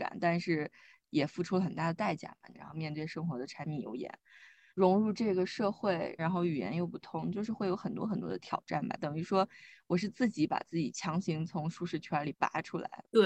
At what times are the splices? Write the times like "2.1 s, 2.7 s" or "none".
2.5 s, 4.7 s, 6.2 s